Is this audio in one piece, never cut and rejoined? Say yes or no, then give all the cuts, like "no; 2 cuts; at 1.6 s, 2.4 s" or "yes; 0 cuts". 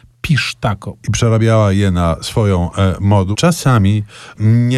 no; 2 cuts; at 1.0 s, 3.3 s